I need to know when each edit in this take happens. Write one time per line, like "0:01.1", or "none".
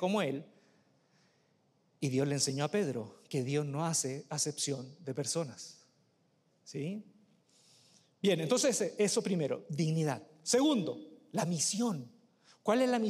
none